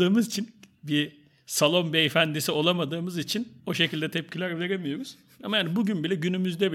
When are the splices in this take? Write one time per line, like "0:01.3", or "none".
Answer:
0:03.6